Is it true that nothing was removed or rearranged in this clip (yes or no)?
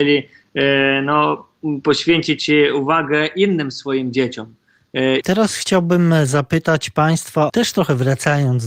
no